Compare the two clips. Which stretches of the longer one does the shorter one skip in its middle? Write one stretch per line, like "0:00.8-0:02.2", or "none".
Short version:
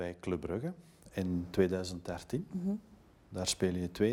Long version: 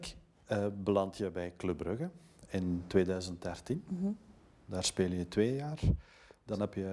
none